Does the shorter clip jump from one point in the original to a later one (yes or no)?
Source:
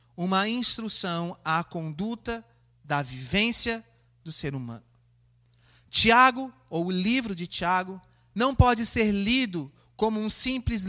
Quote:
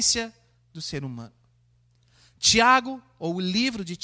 no